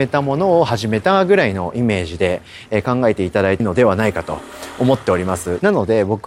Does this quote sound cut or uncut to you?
cut